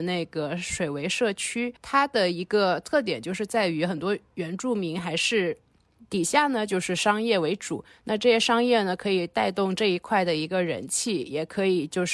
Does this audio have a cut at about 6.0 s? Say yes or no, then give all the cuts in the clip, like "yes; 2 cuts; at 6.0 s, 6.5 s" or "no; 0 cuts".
yes; 2 cuts; at 1.8 s, 6.0 s